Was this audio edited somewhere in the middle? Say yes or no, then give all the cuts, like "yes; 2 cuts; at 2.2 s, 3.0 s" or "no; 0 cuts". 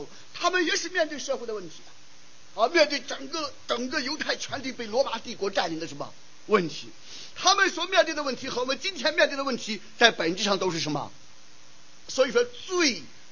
yes; 2 cuts; at 7.3 s, 12.0 s